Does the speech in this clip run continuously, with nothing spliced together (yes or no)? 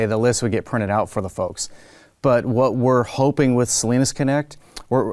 yes